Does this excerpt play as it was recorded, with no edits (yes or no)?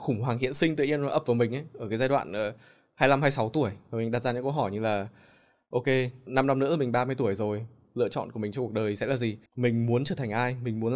no